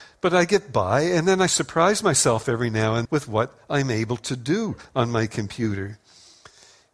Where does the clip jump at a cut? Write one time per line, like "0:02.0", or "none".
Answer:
0:03.1